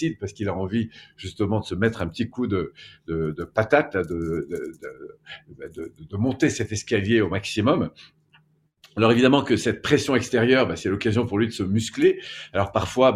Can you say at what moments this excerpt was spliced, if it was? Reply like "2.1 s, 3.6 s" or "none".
none